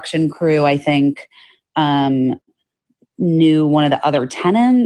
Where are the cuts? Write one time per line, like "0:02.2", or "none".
none